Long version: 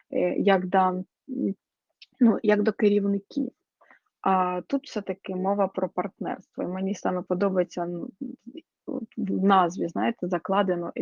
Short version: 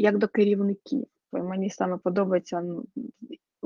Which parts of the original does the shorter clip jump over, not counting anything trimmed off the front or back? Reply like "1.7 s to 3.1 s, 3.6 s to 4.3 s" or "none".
3.7 s to 6.5 s